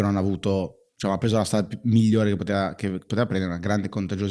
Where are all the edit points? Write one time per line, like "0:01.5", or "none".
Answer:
none